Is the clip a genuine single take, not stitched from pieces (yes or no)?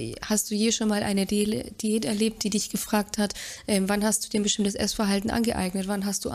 yes